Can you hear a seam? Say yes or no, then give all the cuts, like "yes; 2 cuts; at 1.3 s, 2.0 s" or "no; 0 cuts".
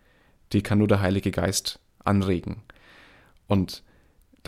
no; 0 cuts